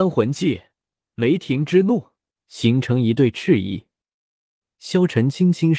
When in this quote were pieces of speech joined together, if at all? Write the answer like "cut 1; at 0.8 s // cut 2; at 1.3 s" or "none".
cut 1; at 2.4 s

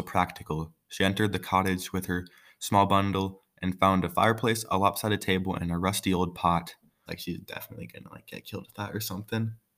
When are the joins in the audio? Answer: cut 1; at 7.1 s

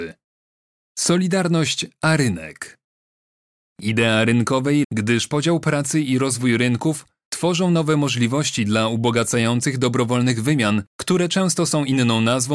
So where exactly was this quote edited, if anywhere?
cut 1; at 3.7 s // cut 2; at 4.8 s

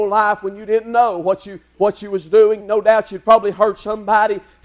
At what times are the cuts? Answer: cut 1; at 2.6 s

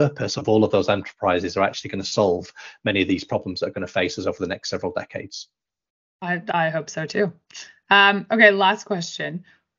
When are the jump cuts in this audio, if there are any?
none

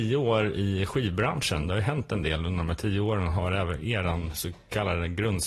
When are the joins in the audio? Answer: none

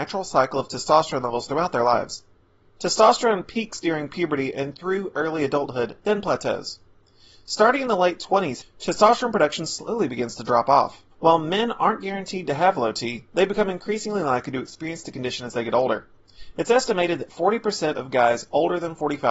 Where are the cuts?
cut 1; at 8.6 s // cut 2; at 11.1 s

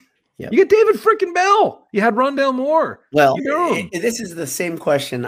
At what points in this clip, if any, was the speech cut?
cut 1; at 3.4 s

